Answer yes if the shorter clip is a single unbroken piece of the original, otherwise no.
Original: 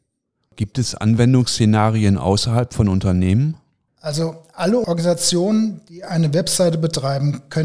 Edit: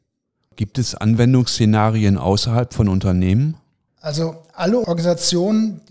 yes